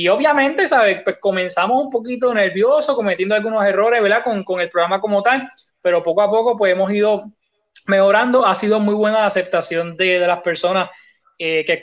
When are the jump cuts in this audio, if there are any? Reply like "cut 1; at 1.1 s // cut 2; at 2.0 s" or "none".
none

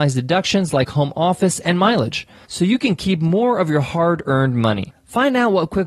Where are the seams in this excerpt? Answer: none

